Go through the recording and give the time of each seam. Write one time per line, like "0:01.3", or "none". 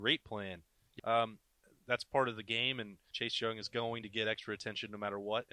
0:01.0
0:03.1